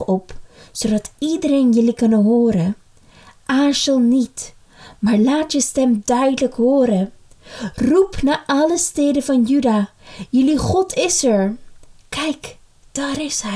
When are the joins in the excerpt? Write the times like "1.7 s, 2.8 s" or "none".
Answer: none